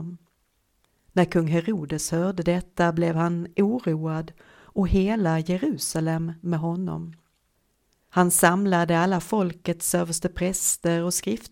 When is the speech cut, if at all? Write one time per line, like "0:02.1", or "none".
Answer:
none